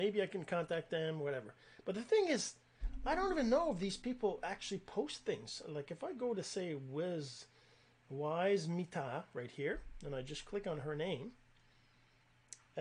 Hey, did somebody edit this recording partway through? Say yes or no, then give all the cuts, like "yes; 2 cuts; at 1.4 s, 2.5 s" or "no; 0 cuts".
no; 0 cuts